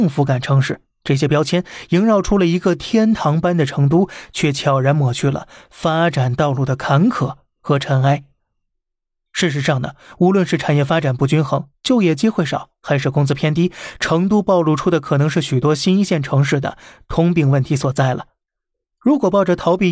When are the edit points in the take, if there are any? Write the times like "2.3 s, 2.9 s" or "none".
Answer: none